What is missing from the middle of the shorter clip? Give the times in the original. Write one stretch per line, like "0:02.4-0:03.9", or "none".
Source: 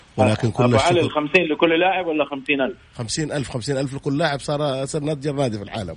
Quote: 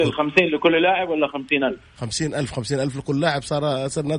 none